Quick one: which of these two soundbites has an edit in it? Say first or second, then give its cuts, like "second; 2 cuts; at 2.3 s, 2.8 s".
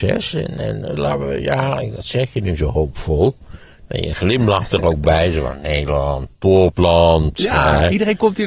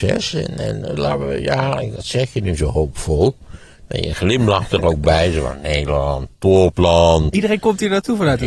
second; 1 cut; at 7.3 s